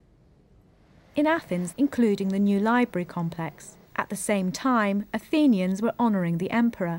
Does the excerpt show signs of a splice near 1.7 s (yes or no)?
yes